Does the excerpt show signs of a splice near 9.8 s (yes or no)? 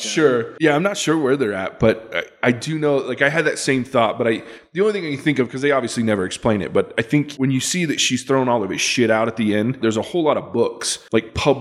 yes